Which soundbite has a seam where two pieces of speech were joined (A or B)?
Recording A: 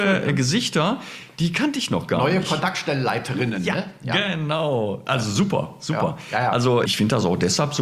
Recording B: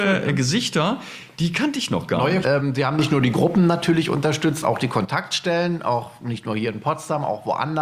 B